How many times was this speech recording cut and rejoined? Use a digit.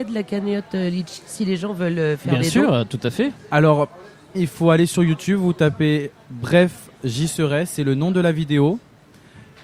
1